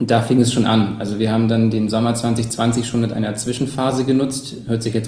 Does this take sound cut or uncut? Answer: uncut